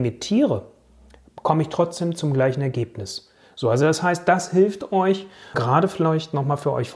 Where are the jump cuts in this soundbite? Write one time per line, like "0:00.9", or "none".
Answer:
0:05.5